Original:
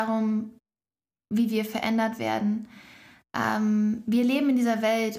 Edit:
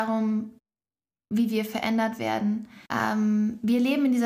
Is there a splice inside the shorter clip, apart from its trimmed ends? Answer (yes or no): yes